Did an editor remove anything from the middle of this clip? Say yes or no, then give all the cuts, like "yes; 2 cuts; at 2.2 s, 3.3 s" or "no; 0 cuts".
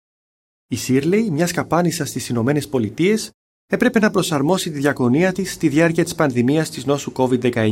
no; 0 cuts